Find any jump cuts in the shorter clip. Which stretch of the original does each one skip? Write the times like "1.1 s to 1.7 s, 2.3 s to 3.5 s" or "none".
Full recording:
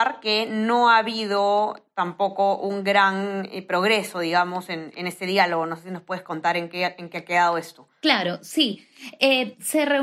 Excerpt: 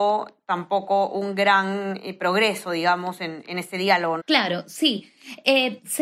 5.7 s to 7.9 s